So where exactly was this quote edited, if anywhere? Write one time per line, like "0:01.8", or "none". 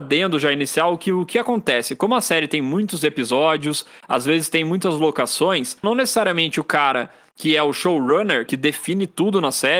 0:05.8
0:08.5